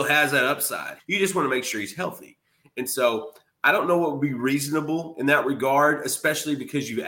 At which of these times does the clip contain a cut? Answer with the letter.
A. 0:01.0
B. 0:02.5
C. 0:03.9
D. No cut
A